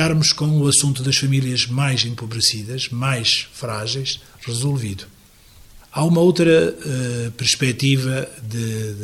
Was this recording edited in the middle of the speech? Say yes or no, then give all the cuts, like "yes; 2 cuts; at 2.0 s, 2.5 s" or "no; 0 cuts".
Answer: yes; 1 cut; at 5.8 s